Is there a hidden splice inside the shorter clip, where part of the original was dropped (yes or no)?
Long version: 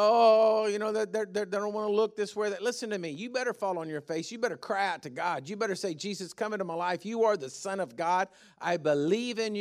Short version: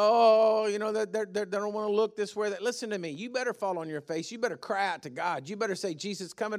no